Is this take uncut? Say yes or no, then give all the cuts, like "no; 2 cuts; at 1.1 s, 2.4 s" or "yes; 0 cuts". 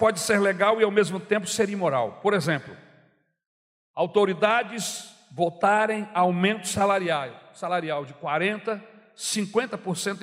yes; 0 cuts